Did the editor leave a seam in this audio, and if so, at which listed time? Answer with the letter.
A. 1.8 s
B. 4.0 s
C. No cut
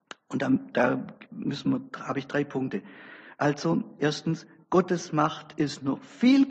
C